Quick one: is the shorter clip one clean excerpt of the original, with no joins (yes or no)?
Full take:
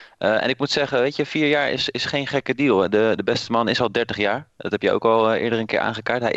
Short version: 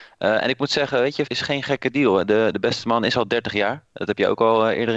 no